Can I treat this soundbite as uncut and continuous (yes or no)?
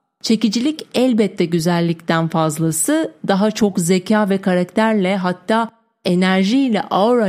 yes